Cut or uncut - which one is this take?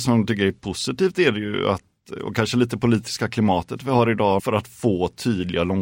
cut